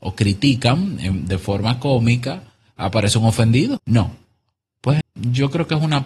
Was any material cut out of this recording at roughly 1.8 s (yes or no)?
no